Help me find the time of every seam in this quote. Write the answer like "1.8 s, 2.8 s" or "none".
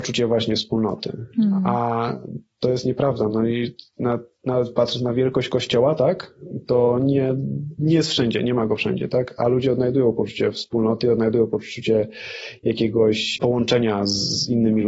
none